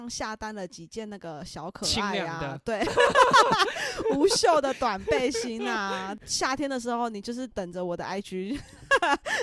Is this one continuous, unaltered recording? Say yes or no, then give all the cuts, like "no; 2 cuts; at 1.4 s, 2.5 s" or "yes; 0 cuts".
yes; 0 cuts